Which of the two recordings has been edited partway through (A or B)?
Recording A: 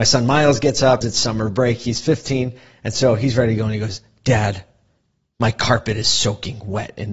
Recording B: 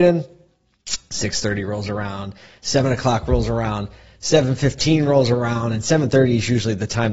A